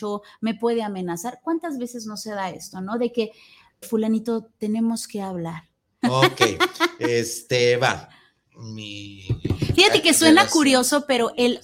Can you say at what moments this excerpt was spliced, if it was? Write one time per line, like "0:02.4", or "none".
0:03.8
0:06.0